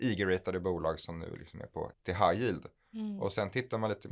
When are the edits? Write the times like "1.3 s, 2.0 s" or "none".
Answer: 1.9 s